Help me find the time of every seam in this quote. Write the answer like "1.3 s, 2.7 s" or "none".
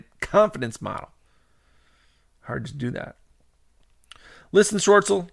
none